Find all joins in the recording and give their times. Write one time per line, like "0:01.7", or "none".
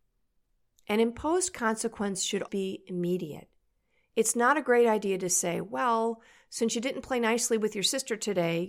0:02.5